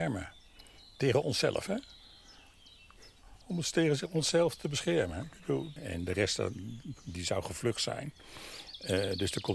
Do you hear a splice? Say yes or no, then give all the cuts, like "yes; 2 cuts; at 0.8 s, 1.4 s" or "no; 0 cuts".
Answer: yes; 2 cuts; at 3.4 s, 5.8 s